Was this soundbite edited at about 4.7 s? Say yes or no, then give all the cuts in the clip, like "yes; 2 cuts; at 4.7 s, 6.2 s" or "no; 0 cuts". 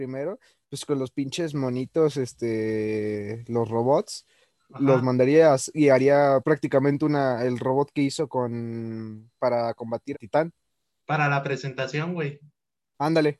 no; 2 cuts; at 6.4 s, 10.1 s